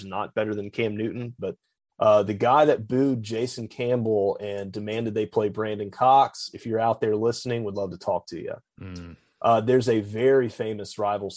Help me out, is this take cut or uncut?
cut